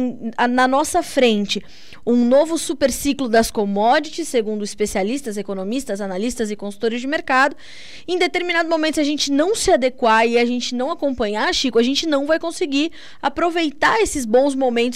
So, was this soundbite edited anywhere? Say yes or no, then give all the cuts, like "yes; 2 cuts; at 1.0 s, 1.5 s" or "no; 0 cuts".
no; 0 cuts